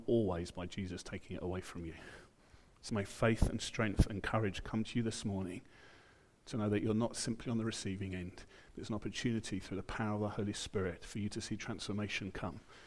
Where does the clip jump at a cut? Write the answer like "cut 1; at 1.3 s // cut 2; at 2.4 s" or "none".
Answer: cut 1; at 2.9 s

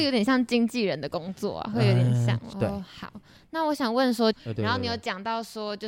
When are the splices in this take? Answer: cut 1; at 2.5 s // cut 2; at 4.3 s

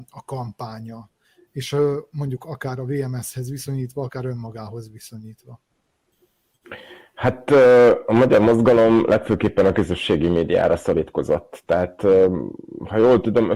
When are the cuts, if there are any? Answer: none

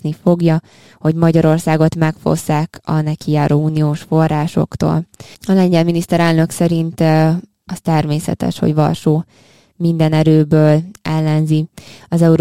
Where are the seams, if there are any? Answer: cut 1; at 5.3 s

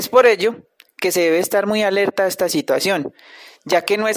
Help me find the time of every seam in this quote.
none

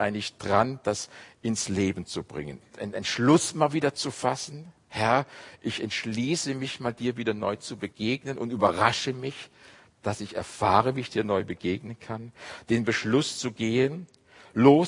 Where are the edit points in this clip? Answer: cut 1; at 2.6 s

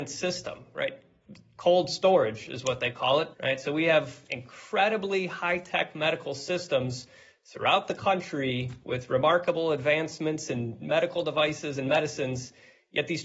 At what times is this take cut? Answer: cut 1; at 3.3 s

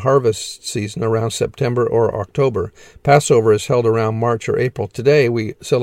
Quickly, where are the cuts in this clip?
none

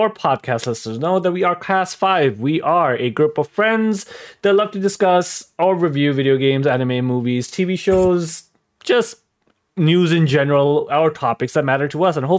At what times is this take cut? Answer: none

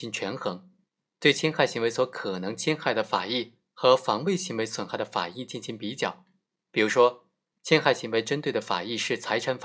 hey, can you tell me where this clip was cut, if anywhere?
none

